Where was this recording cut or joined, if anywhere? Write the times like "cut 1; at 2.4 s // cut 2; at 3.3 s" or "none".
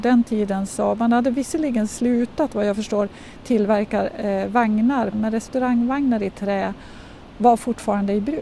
cut 1; at 5.1 s

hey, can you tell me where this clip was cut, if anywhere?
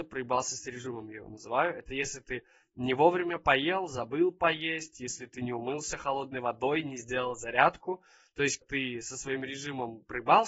cut 1; at 8.6 s

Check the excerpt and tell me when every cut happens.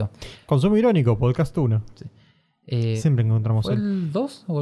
cut 1; at 3.0 s

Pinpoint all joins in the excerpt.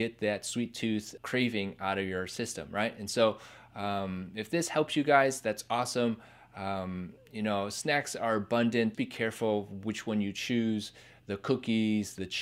cut 1; at 1.2 s // cut 2; at 8.9 s

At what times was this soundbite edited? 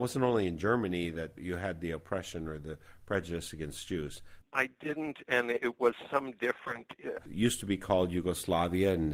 cut 1; at 4.4 s // cut 2; at 7.2 s

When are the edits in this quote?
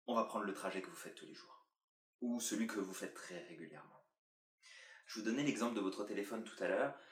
cut 1; at 5.0 s

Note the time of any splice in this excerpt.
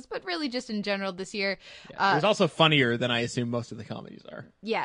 none

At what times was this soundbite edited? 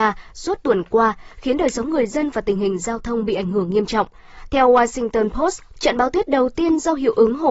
cut 1; at 5.7 s

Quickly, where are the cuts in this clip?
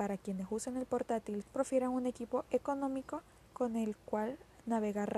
cut 1; at 1.4 s

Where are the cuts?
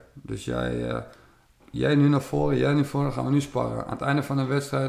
none

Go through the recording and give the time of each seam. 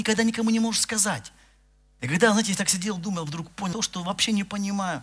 cut 1; at 2.0 s // cut 2; at 3.7 s

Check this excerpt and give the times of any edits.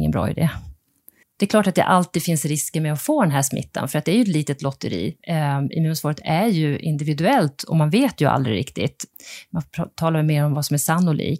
cut 1; at 1.2 s

